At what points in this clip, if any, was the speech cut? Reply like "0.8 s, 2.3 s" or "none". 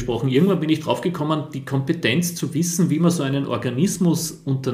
none